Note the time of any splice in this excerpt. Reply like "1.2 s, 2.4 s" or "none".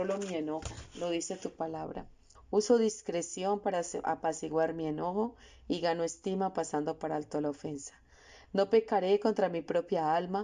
2.4 s